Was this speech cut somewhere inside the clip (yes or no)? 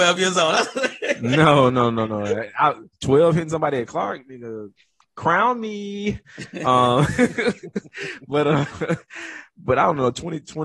no